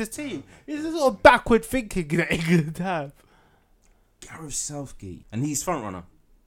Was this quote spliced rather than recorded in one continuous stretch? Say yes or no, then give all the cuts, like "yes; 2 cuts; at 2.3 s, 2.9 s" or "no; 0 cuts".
yes; 1 cut; at 5.2 s